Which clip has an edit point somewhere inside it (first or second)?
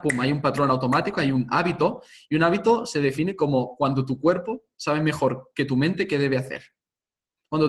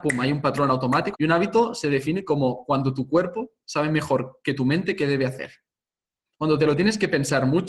second